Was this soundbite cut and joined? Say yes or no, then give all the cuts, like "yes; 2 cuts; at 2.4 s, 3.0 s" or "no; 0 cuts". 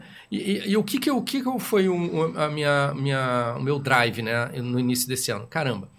no; 0 cuts